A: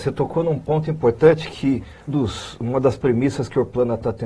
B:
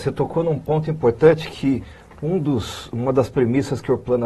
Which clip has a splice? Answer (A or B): A